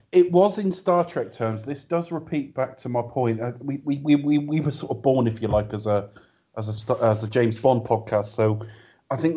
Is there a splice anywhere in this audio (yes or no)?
no